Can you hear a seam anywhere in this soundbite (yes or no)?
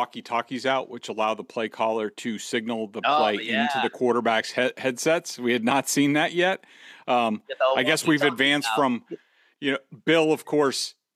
no